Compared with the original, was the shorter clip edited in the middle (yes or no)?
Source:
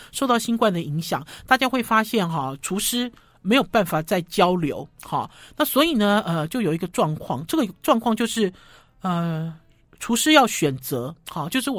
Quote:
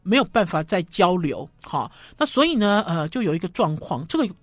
no